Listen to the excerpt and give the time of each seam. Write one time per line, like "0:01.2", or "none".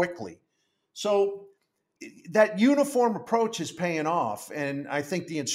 0:02.0